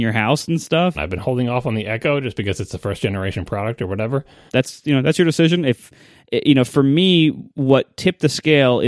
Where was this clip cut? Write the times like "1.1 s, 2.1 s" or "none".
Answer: 0.9 s, 4.5 s